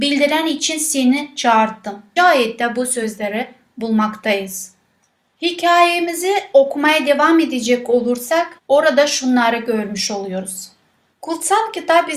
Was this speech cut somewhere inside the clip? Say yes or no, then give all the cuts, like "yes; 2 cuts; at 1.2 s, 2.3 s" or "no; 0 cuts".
yes; 3 cuts; at 2.2 s, 8.6 s, 11.1 s